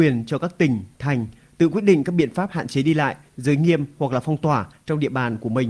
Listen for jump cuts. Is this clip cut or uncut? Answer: uncut